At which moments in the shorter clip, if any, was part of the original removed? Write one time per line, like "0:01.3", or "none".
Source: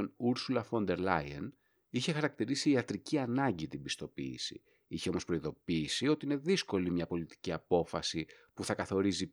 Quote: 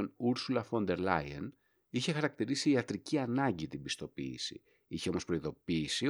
none